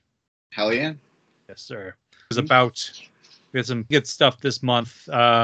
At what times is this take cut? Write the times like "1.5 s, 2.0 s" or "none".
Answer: 2.3 s, 3.9 s